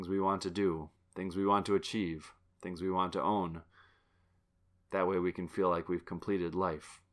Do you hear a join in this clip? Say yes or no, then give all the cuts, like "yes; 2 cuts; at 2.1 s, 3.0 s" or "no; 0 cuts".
no; 0 cuts